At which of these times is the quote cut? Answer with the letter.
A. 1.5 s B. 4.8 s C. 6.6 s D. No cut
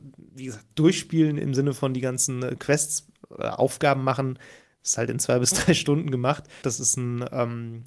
C